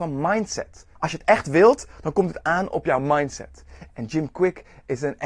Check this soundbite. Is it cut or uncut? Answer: cut